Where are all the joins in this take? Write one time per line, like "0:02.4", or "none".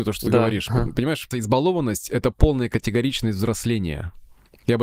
0:01.3